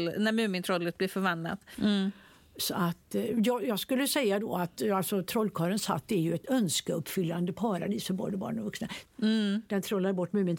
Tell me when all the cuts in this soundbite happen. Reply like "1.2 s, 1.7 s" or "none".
1.7 s, 9.1 s